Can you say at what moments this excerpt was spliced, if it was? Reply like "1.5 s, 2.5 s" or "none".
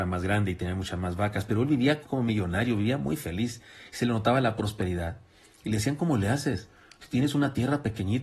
2.0 s